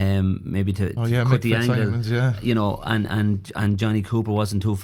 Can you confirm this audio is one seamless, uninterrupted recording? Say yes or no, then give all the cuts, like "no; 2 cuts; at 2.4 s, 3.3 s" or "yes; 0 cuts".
no; 1 cut; at 1.0 s